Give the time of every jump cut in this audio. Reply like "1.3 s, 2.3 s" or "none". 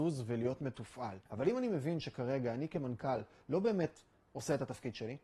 1.3 s